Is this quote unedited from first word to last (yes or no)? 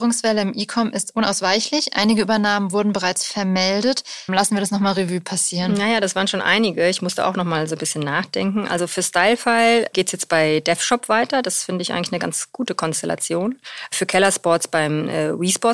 no